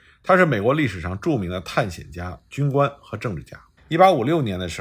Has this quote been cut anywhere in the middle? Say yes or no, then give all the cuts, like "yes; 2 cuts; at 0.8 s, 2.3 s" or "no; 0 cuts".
yes; 1 cut; at 3.8 s